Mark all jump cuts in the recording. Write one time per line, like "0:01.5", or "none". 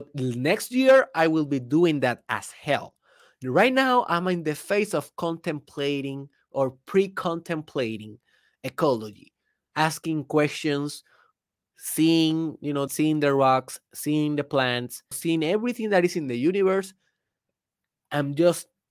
0:12.9
0:15.1